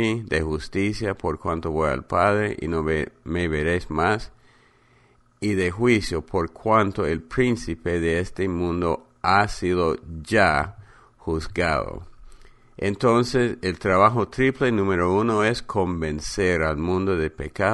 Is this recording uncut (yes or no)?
yes